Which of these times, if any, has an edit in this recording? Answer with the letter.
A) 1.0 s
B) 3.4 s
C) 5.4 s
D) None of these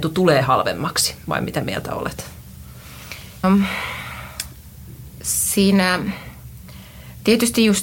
B